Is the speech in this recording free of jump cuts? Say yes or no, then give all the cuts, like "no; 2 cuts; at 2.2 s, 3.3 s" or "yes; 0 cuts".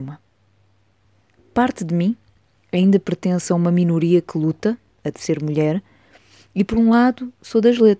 yes; 0 cuts